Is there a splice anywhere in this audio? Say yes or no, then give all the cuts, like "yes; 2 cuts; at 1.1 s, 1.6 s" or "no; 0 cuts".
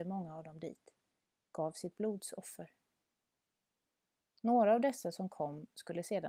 no; 0 cuts